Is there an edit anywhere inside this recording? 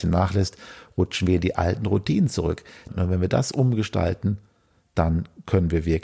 yes; 1 cut; at 2.9 s

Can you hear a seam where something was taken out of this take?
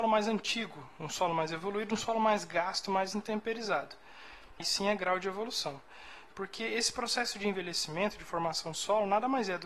yes; 2 cuts; at 4.6 s, 6.3 s

